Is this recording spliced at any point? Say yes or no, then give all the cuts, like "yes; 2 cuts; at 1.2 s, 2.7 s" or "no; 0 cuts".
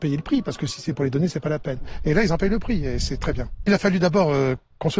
no; 0 cuts